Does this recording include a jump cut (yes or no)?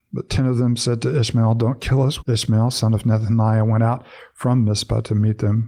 yes